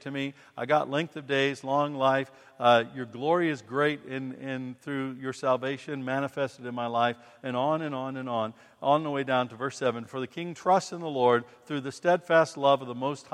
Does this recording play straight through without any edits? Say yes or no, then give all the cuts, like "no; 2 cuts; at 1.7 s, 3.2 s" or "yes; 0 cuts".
yes; 0 cuts